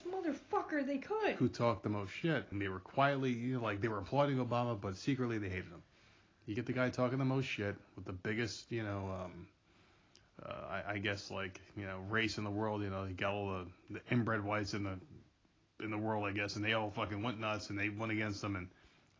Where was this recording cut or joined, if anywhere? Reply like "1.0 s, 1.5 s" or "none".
2.5 s